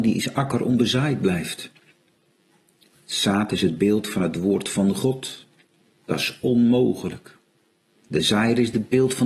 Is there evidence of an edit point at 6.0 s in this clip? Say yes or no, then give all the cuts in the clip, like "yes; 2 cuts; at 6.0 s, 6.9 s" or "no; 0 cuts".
yes; 2 cuts; at 6.0 s, 7.9 s